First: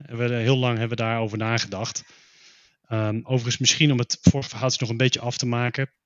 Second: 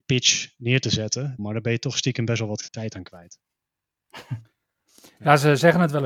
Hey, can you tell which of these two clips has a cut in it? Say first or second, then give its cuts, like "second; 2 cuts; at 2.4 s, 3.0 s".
second; 2 cuts; at 1.4 s, 2.7 s